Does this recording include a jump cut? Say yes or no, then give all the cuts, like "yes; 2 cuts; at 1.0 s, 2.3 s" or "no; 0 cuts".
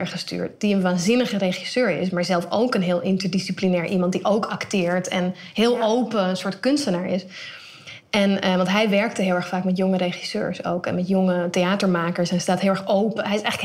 no; 0 cuts